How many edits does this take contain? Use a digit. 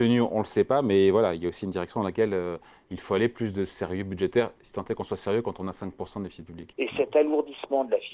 1